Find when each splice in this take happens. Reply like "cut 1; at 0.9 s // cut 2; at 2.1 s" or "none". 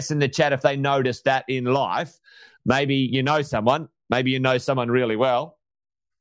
none